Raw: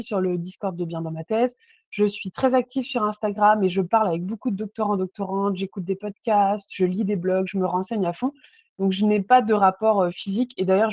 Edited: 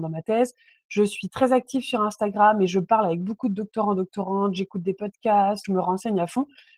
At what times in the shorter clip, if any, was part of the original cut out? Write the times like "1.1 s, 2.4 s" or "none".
5.6 s